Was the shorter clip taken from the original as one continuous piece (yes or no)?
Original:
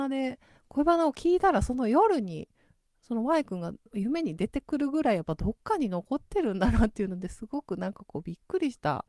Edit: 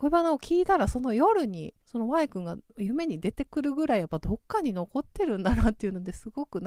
no